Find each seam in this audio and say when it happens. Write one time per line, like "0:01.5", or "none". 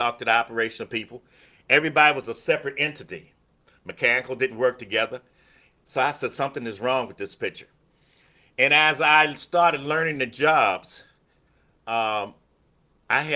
none